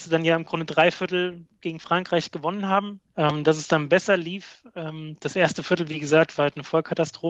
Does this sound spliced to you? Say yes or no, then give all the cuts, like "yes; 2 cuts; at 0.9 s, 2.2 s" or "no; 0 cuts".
yes; 1 cut; at 3.1 s